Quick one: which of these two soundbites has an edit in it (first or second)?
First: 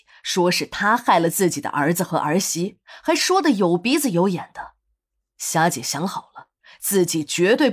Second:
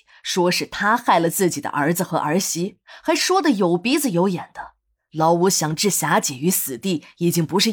second